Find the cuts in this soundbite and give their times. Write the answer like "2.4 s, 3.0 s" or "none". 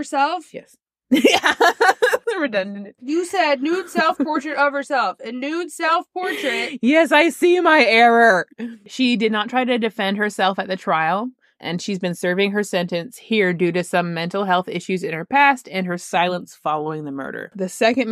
11.6 s